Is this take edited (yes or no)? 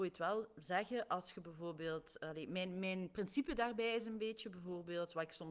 no